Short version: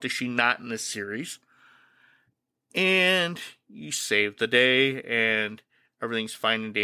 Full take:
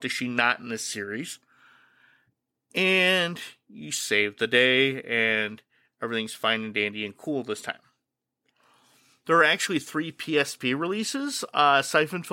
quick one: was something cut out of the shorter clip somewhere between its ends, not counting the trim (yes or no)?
no